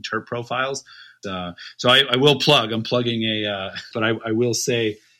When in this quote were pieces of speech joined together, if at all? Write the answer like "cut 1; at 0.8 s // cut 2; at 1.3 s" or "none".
cut 1; at 1.2 s // cut 2; at 3.9 s